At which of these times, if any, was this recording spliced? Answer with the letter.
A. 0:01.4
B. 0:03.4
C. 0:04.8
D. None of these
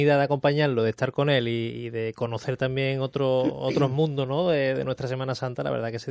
D